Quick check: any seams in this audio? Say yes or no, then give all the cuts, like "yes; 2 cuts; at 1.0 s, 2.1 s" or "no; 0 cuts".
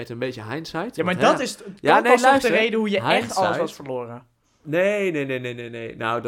no; 0 cuts